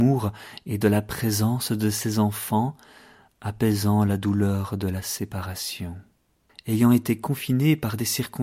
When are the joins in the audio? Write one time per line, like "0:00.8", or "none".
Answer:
0:06.5